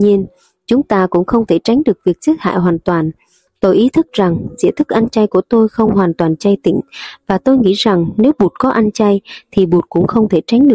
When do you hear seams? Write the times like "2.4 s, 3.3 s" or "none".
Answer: 3.5 s